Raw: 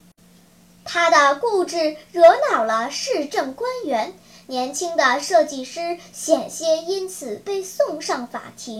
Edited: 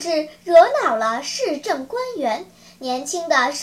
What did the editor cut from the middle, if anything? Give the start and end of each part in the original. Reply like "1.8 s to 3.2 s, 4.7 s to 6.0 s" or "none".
none